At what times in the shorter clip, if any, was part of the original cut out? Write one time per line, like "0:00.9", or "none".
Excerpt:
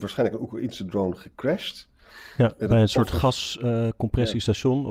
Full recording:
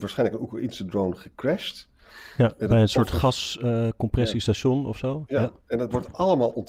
none